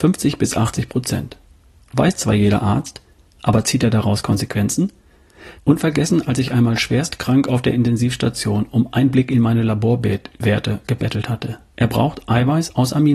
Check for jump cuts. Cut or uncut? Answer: cut